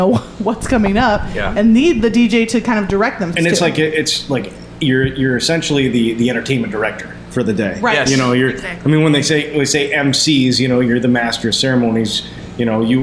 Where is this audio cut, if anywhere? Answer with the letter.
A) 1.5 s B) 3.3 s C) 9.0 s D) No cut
B